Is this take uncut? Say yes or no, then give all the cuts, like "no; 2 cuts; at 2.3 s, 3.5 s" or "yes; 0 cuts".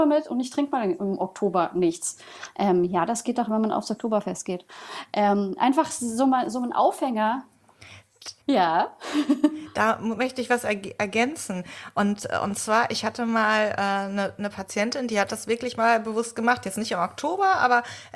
no; 1 cut; at 8.4 s